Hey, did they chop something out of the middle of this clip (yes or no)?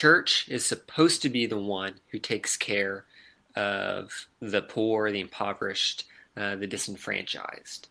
no